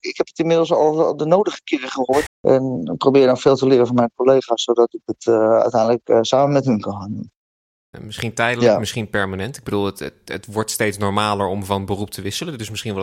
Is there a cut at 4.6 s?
no; 2 cuts; at 2.3 s, 7.9 s

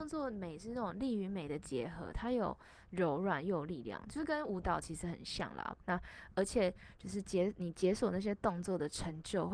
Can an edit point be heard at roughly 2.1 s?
no; 1 cut; at 5.8 s

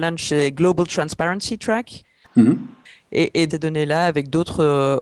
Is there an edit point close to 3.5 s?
yes; 2 cuts; at 2.2 s, 3.5 s

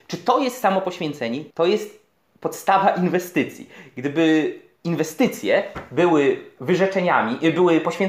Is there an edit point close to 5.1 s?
no; 1 cut; at 1.5 s

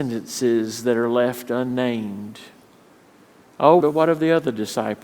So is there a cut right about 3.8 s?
yes; 1 cut; at 3.8 s

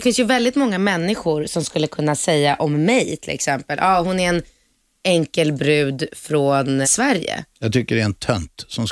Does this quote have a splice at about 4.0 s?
no; 1 cut; at 6.8 s

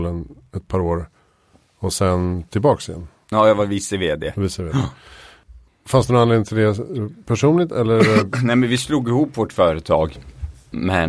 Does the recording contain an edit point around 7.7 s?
no; 0 cuts

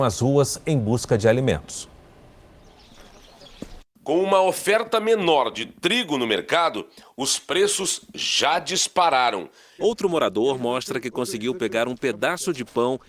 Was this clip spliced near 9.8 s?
yes; 2 cuts; at 3.8 s, 9.8 s

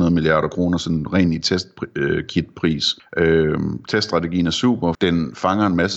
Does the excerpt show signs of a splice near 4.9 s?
yes; 2 cuts; at 3.0 s, 4.9 s

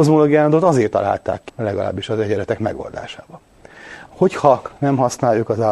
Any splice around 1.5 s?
yes; 2 cuts; at 1.5 s, 4.1 s

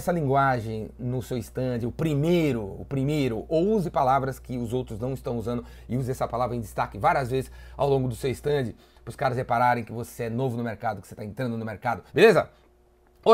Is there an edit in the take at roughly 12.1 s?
yes; 1 cut; at 12.1 s

